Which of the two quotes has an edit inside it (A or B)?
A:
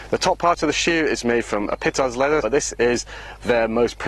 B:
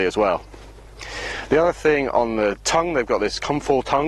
A